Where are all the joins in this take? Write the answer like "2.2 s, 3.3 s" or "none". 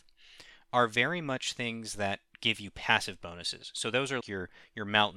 4.2 s